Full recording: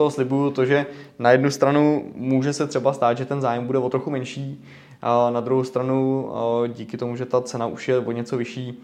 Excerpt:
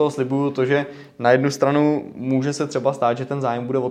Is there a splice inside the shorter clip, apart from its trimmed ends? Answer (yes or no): no